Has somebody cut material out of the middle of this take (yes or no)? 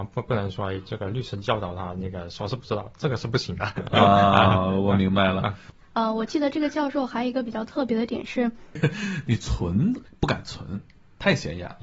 yes